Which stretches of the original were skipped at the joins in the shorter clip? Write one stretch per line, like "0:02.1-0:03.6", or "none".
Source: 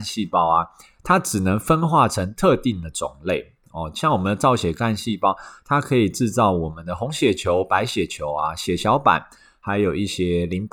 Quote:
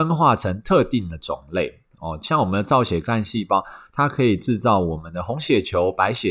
none